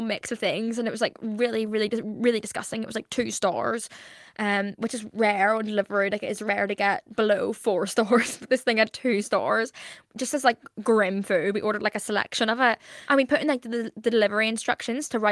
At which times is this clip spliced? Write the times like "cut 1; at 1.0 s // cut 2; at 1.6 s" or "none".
none

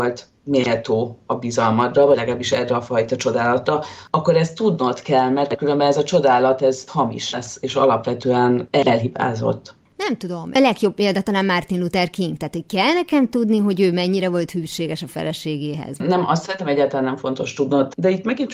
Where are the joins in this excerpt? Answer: none

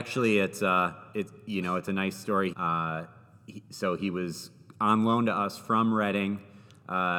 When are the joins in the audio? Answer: cut 1; at 2.5 s

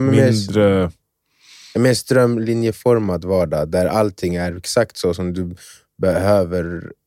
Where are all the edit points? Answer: none

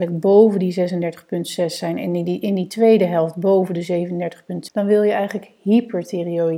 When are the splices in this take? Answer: cut 1; at 4.7 s

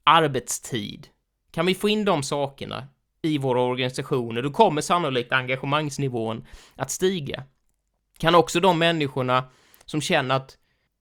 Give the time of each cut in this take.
none

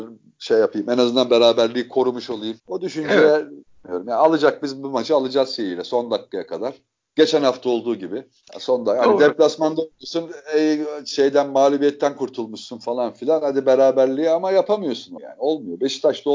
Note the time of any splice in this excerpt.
cut 1; at 2.6 s

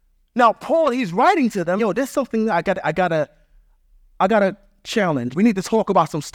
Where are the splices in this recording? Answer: cut 1; at 1.8 s // cut 2; at 5.3 s

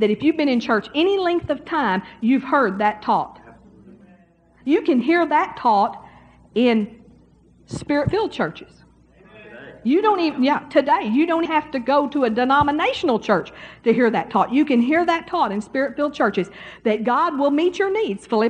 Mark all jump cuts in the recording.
cut 1; at 11.5 s

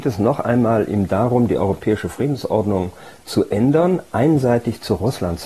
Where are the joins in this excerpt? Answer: none

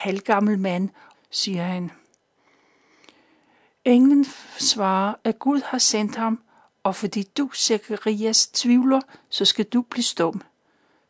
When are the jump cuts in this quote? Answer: cut 1; at 1.1 s

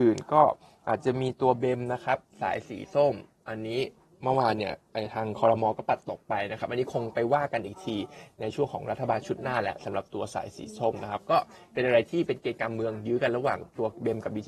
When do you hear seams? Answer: none

